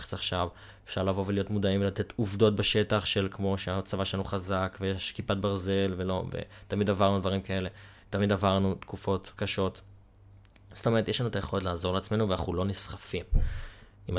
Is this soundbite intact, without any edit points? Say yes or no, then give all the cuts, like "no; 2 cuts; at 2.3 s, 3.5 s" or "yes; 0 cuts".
yes; 0 cuts